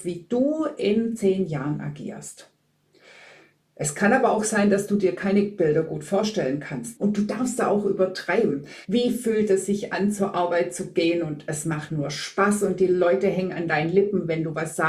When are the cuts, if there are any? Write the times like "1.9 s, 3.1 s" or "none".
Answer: 7.0 s, 8.8 s, 11.9 s